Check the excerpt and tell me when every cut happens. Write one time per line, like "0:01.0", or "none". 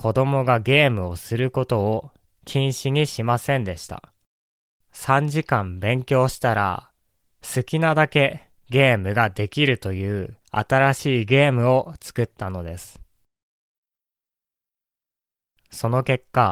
0:04.8
0:08.6
0:10.4